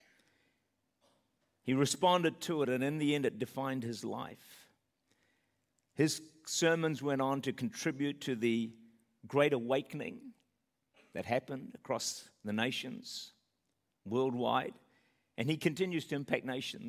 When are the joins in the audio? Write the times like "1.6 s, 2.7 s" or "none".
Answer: none